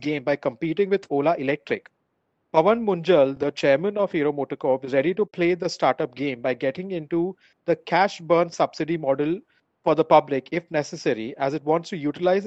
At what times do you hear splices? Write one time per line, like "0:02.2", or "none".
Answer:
none